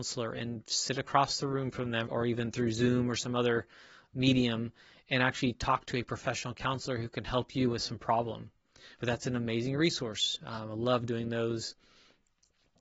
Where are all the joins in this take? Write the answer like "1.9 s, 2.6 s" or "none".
2.0 s, 8.9 s, 10.4 s